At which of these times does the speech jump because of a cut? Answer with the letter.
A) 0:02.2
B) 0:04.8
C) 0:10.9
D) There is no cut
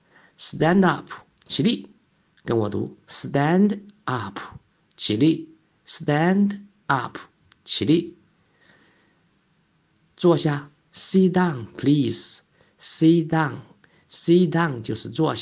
B